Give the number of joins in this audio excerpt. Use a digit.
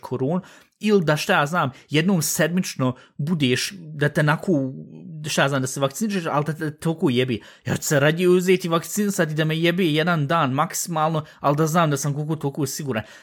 0